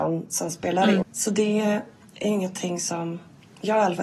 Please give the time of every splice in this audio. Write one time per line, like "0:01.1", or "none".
0:01.0